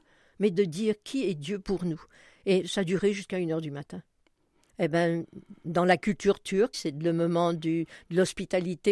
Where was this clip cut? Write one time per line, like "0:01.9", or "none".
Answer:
0:04.7
0:06.7